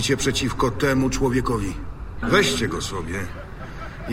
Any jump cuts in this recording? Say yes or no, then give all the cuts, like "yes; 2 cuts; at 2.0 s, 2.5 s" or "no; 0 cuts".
yes; 1 cut; at 2.2 s